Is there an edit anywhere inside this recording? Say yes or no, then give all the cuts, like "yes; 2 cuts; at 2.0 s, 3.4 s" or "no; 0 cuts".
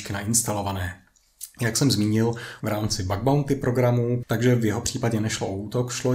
yes; 2 cuts; at 2.6 s, 4.2 s